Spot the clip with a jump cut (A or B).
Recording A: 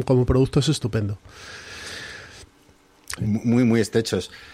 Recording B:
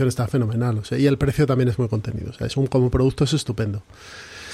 A